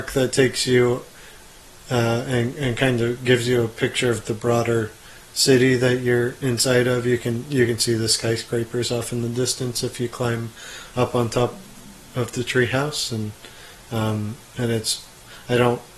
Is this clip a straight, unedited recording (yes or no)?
yes